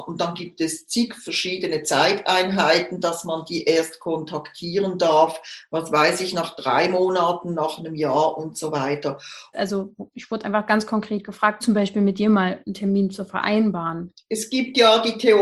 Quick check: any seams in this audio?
yes; 3 cuts; at 9.5 s, 11.6 s, 14.2 s

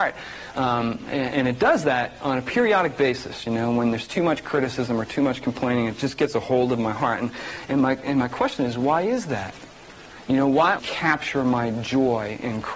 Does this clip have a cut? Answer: yes; 1 cut; at 10.8 s

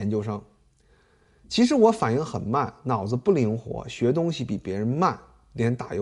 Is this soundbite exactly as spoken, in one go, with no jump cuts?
yes; 0 cuts

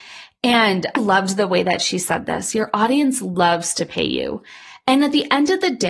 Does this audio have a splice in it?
yes; 1 cut; at 1.0 s

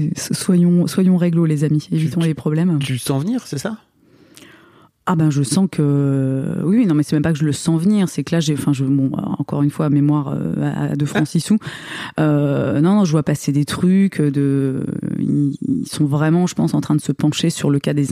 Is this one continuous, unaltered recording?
yes; 0 cuts

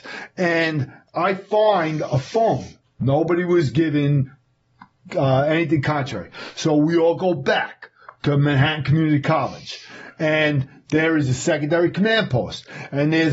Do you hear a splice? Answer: yes; 1 cut; at 2.8 s

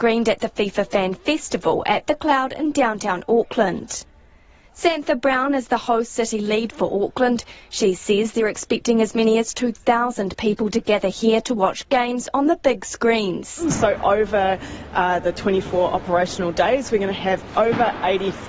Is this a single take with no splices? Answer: yes; 0 cuts

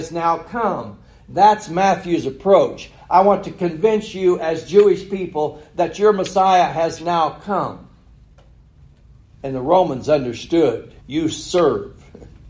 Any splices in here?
yes; 2 cuts; at 9.4 s, 11.0 s

